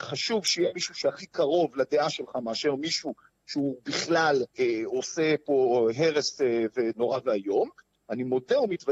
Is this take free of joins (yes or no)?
no